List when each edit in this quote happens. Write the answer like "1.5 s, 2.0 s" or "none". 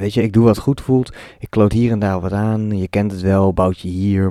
none